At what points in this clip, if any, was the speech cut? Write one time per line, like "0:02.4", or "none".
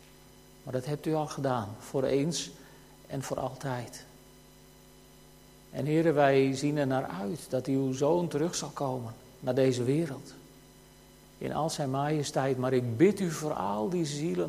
none